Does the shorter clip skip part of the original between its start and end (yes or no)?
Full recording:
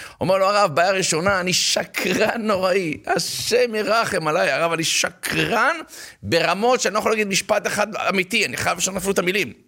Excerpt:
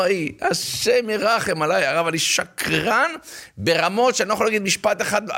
no